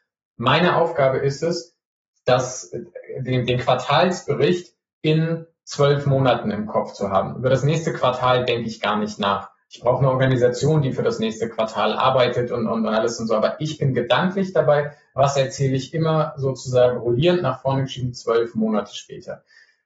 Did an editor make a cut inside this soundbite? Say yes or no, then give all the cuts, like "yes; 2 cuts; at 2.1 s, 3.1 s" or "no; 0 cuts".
no; 0 cuts